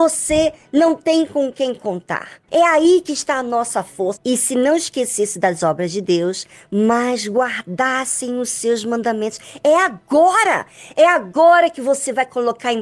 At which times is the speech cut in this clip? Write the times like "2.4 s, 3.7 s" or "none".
2.5 s, 4.2 s